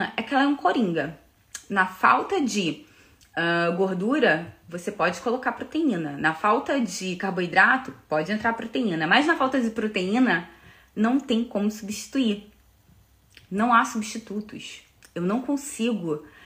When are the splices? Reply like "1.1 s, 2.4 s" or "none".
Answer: none